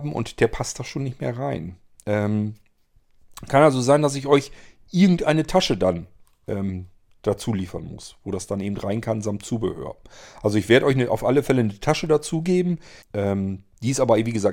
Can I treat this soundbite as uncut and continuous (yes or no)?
no